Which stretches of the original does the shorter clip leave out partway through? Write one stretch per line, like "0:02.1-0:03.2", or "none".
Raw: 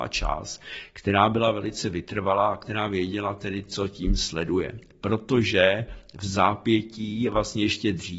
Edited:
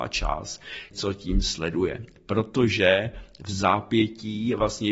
0:00.9-0:03.7